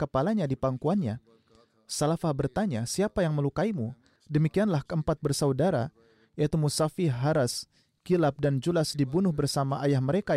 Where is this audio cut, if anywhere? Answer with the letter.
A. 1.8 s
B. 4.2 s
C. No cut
B